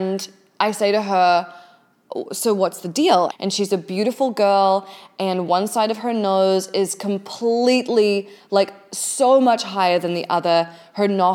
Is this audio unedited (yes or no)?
no